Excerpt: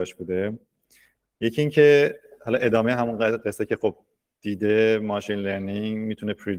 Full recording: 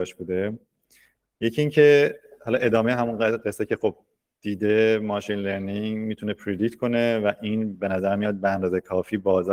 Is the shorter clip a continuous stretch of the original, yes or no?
yes